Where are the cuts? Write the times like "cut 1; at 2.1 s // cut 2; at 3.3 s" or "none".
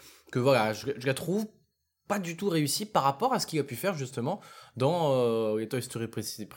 none